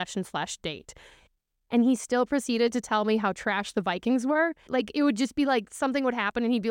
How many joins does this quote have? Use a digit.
1